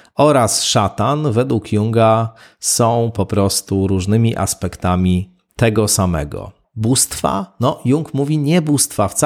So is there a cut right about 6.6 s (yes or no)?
yes